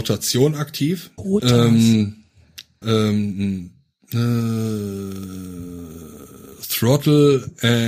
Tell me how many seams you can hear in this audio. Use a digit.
2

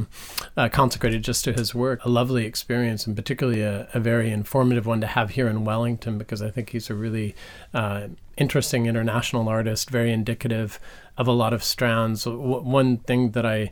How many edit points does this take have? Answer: 1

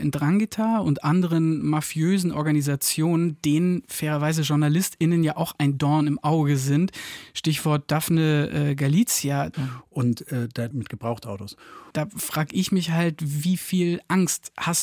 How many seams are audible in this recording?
3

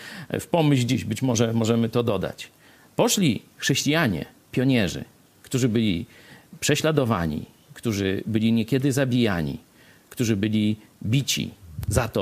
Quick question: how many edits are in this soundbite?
0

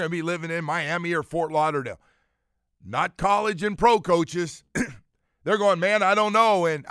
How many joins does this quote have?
0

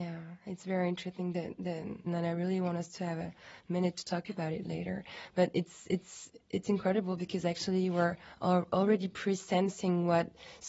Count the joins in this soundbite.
1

